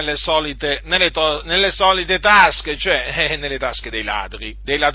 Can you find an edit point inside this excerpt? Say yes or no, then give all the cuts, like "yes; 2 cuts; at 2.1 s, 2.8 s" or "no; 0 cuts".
no; 0 cuts